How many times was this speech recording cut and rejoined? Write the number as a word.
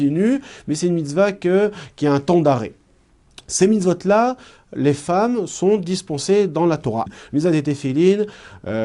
one